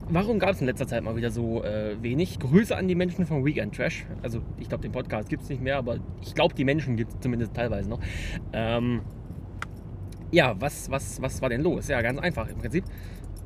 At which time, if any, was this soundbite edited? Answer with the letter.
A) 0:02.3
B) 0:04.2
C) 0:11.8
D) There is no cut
A